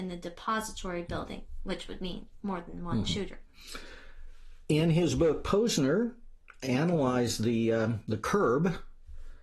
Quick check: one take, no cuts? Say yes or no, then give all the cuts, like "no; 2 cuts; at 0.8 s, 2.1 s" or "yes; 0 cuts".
yes; 0 cuts